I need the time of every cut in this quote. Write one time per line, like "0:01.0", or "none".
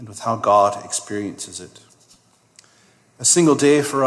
none